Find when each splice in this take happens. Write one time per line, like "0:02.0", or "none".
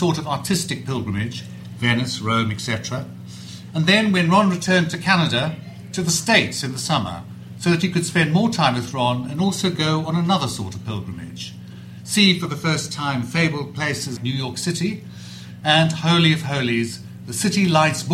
0:14.2